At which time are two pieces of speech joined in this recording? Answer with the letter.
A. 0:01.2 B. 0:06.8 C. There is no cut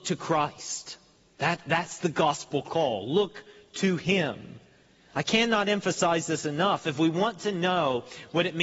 C